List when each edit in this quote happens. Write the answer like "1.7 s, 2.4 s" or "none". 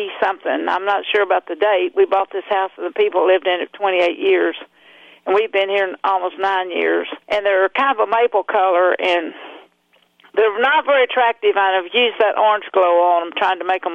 7.2 s